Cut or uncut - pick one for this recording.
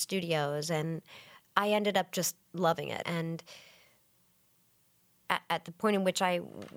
cut